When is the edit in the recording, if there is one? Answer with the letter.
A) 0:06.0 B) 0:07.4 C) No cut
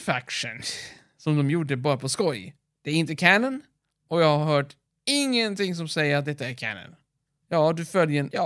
B